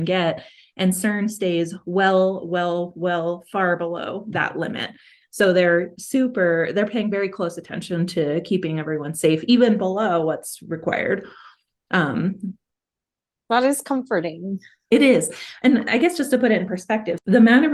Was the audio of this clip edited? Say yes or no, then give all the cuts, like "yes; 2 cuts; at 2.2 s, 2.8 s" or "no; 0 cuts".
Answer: no; 0 cuts